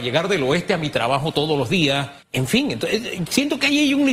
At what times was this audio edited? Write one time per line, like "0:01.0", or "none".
0:02.2